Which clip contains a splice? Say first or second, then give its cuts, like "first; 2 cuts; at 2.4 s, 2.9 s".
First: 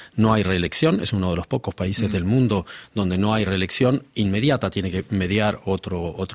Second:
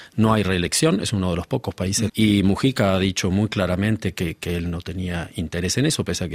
second; 1 cut; at 2.1 s